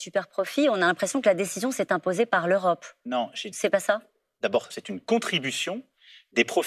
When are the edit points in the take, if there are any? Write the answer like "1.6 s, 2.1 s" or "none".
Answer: 4.7 s